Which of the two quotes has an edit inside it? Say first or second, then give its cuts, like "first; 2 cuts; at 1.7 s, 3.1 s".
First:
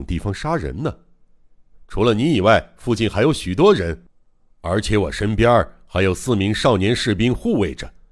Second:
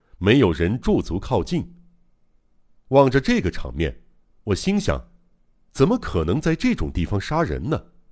first; 1 cut; at 1.7 s